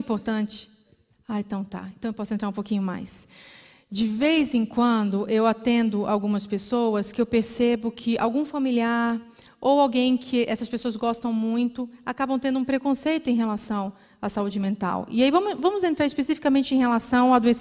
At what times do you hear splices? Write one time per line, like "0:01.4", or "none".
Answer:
none